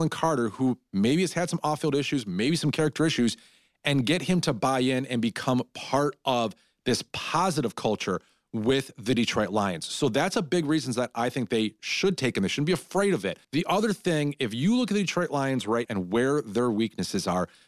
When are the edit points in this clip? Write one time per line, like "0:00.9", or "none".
0:13.4
0:15.9